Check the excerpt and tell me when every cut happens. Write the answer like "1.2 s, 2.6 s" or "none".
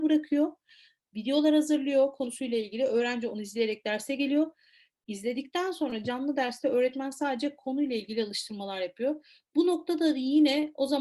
none

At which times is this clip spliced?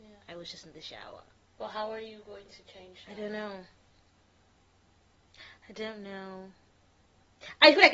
none

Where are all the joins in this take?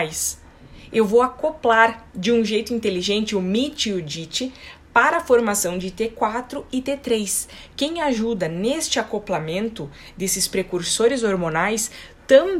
2.1 s

